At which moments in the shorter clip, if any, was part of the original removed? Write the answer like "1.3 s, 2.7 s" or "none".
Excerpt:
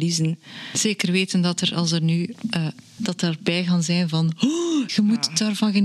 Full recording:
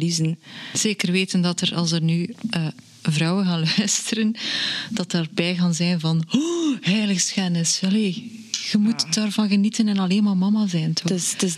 3.0 s, 4.9 s